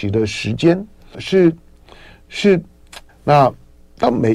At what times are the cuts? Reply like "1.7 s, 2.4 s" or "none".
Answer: 1.1 s, 3.1 s